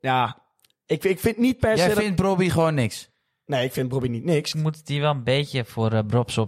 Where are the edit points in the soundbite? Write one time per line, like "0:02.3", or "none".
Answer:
0:04.5